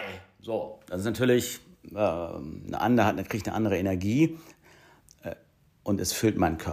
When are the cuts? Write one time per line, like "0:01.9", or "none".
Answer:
none